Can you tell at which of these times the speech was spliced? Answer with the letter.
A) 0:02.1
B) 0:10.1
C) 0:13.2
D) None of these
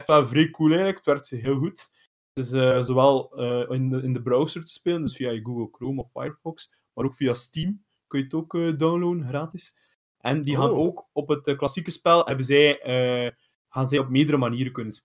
B